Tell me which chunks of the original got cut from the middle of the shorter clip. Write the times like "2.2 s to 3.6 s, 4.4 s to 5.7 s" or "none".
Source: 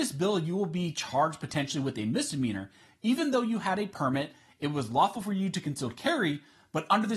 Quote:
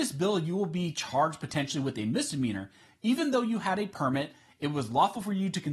none